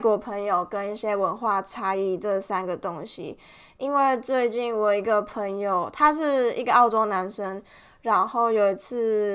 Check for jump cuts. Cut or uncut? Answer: uncut